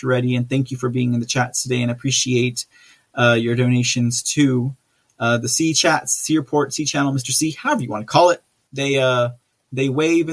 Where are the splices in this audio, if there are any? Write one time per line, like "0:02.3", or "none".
0:08.7